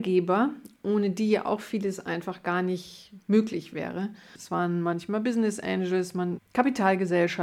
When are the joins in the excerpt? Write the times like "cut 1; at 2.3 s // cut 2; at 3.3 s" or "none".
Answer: cut 1; at 4.4 s // cut 2; at 6.4 s